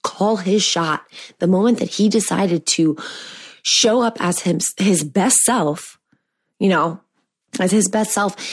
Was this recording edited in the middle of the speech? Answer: yes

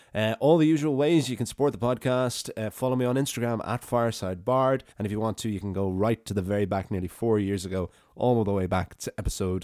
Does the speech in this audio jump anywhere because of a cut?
yes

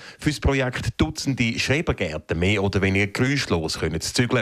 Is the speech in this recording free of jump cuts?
yes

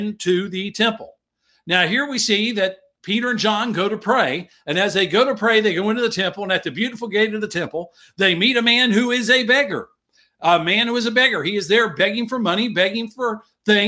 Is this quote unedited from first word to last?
yes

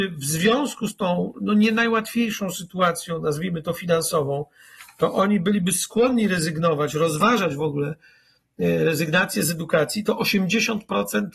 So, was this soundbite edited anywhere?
no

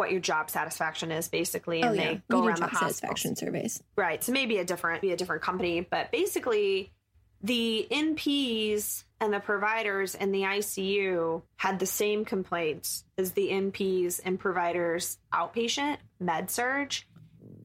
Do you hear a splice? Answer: yes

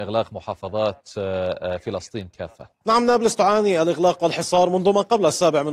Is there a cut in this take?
yes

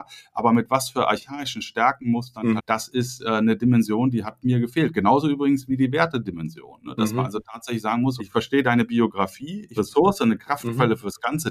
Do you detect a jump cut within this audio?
yes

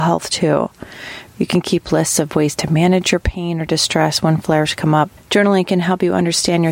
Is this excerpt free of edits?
no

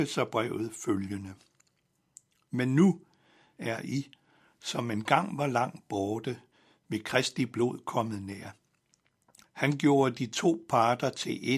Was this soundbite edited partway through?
yes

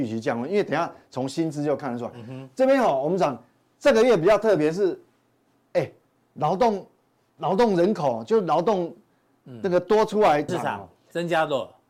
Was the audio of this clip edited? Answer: yes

